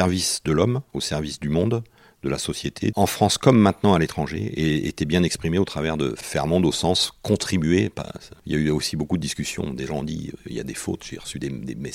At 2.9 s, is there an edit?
yes; 1 cut; at 2.9 s

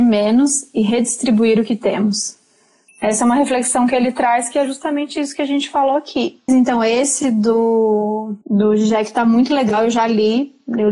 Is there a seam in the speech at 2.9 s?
yes; 3 cuts; at 2.9 s, 6.5 s, 8.4 s

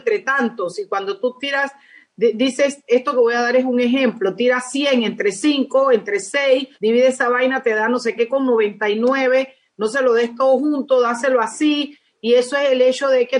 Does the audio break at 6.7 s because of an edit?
yes; 1 cut; at 6.7 s

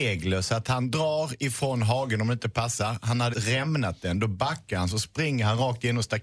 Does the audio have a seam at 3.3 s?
yes; 1 cut; at 3.3 s

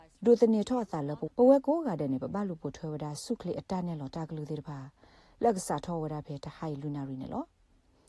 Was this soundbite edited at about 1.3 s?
yes; 1 cut; at 1.3 s

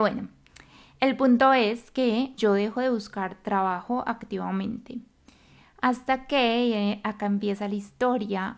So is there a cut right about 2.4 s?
yes; 1 cut; at 2.4 s

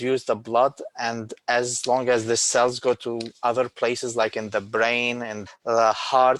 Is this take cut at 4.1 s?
no; 1 cut; at 5.5 s

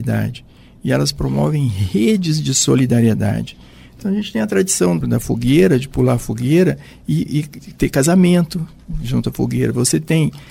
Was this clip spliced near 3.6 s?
no; 2 cuts; at 5.0 s, 7.6 s

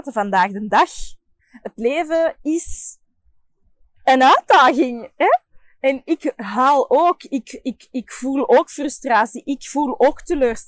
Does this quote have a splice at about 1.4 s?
yes; 1 cut; at 1.4 s

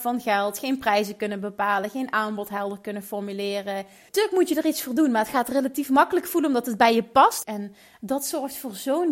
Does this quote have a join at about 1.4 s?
no; 2 cuts; at 4.1 s, 7.4 s

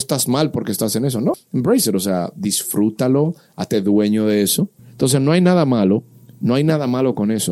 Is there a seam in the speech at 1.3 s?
yes; 2 cuts; at 1.3 s, 4.8 s

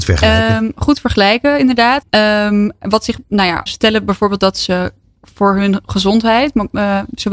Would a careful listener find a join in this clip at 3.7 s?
yes; 2 cuts; at 2.0 s, 3.7 s

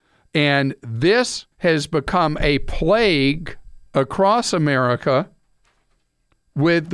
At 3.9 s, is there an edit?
yes; 2 cuts; at 1.5 s, 3.9 s

